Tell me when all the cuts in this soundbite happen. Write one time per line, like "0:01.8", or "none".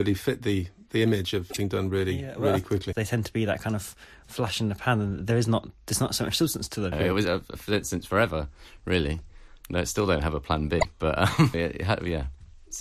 0:02.9
0:06.9
0:11.5